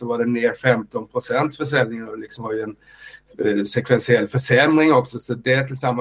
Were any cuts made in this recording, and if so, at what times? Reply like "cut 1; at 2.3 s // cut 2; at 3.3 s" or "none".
none